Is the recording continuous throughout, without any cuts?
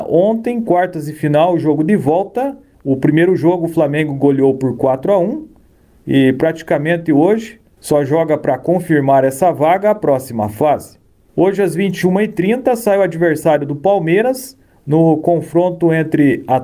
no; 1 cut; at 2.7 s

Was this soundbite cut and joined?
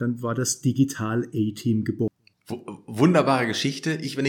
yes; 1 cut; at 2.3 s

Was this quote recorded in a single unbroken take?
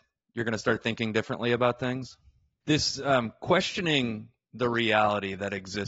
no; 1 cut; at 2.6 s

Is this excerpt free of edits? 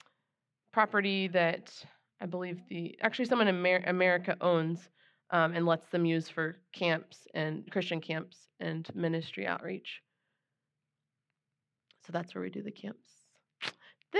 yes; 0 cuts

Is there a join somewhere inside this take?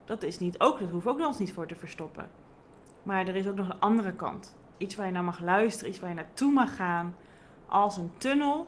yes; 1 cut; at 4.7 s

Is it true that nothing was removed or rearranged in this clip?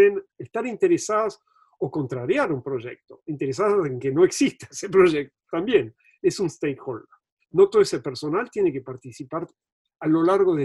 no; 1 cut; at 7.4 s

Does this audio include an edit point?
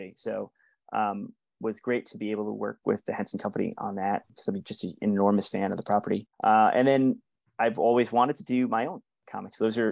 yes; 1 cut; at 6.3 s

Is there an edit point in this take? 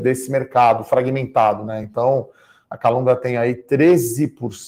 no; 0 cuts

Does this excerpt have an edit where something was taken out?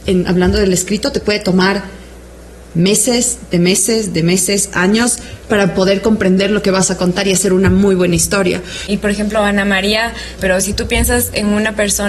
yes; 2 cuts; at 8.9 s, 10.4 s

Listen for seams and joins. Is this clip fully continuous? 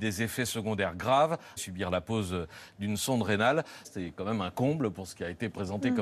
no; 2 cuts; at 1.6 s, 3.8 s

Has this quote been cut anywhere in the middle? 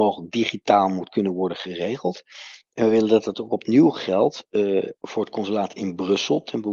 yes; 2 cuts; at 2.7 s, 5.0 s

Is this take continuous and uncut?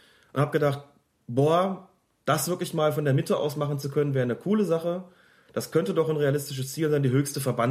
yes; 0 cuts

